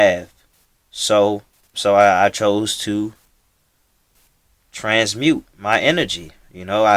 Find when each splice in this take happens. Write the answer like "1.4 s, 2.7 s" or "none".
1.7 s